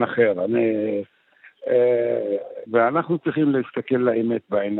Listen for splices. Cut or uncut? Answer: cut